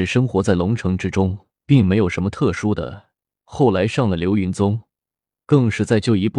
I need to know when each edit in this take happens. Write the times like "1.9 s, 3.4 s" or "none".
1.5 s